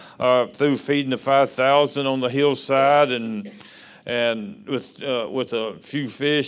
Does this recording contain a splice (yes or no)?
no